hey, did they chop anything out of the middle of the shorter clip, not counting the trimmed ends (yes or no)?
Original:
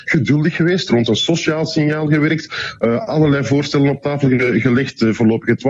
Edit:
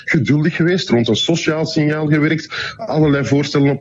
yes